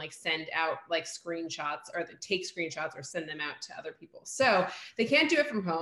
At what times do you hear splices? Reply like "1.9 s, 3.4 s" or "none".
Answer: none